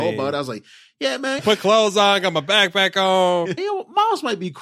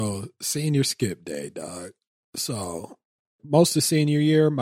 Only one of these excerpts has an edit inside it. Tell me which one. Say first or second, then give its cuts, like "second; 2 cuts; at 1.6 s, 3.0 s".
first; 2 cuts; at 1.4 s, 3.6 s